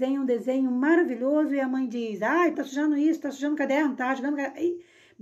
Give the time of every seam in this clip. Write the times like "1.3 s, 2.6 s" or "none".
2.5 s